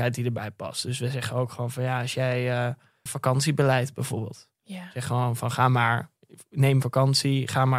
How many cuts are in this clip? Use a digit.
1